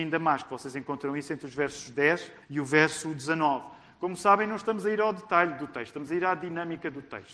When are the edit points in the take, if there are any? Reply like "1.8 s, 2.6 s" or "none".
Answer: 2.4 s